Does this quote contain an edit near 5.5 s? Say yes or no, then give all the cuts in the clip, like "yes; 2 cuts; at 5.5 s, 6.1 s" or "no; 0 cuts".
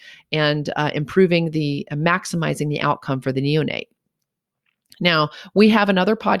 no; 0 cuts